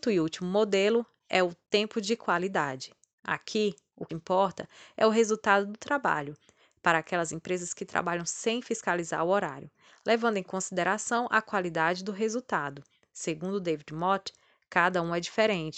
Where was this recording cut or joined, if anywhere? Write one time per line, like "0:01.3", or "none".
0:04.1